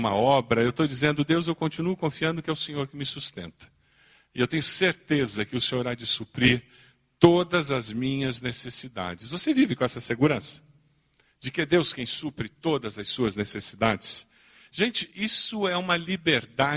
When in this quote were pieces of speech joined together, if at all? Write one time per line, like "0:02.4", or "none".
none